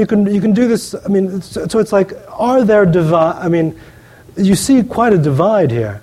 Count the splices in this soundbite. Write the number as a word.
zero